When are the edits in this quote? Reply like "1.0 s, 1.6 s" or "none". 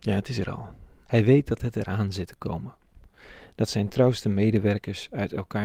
1.1 s

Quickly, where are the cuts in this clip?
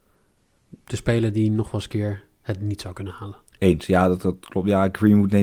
3.5 s

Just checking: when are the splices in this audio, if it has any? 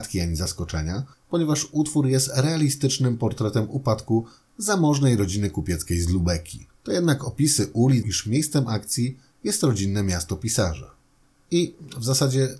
6.8 s, 8.0 s

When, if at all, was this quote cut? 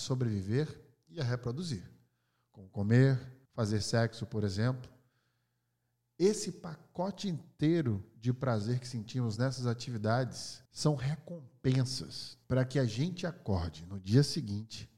3.5 s, 10.7 s, 12.4 s

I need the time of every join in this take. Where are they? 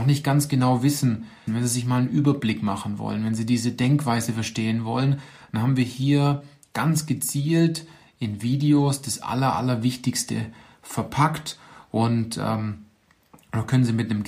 1.5 s

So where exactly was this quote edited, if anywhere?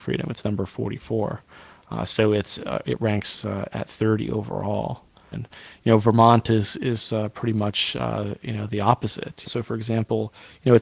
5.3 s, 9.4 s

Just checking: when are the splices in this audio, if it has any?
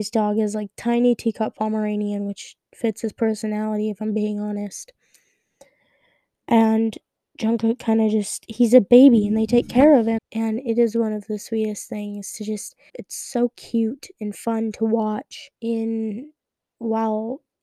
10.2 s, 12.9 s, 15.6 s

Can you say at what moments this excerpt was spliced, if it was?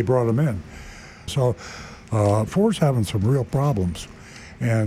1.3 s, 2.5 s

